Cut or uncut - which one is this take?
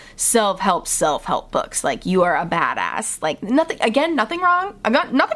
uncut